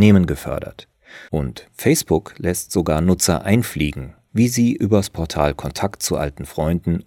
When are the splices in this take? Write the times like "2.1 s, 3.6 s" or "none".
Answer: 1.3 s, 4.3 s